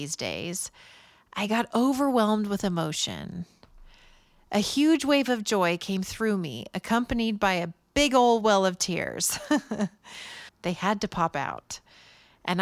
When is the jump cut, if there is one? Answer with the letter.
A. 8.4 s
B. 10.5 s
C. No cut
B